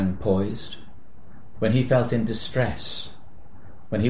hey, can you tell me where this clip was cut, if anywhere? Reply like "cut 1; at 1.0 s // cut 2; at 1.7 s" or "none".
cut 1; at 1.5 s

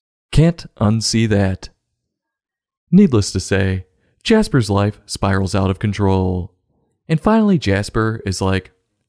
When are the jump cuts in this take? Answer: none

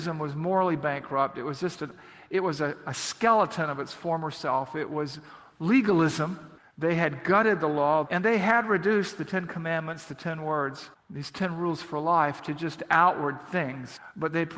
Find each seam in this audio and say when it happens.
cut 1; at 8.0 s

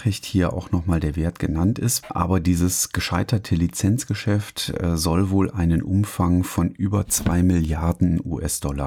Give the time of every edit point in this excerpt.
cut 1; at 2.0 s

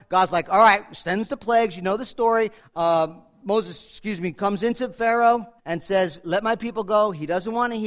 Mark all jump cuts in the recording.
cut 1; at 2.6 s // cut 2; at 5.6 s

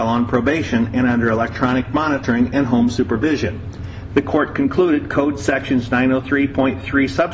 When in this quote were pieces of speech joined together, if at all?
cut 1; at 4.1 s

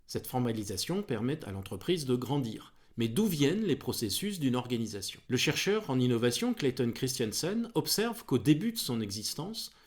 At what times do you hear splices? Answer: cut 1; at 2.8 s // cut 2; at 5.2 s

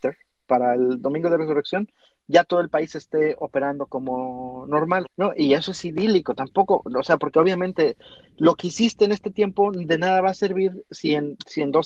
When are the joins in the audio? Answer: cut 1; at 5.1 s

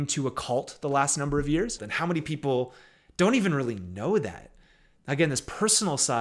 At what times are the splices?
cut 1; at 1.8 s

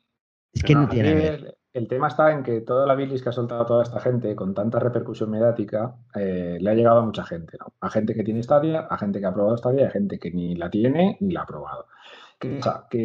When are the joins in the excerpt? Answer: none

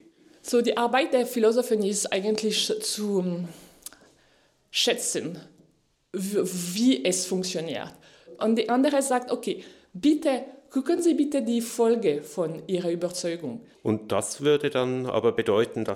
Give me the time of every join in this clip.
cut 1; at 8.4 s // cut 2; at 13.7 s

